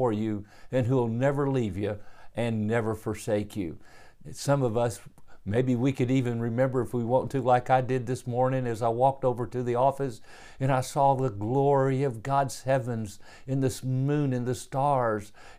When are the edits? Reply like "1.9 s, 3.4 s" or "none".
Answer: 4.2 s